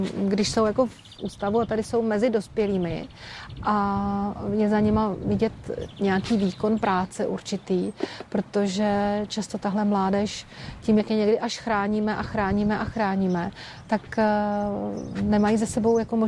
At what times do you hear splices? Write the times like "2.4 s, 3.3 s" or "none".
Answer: none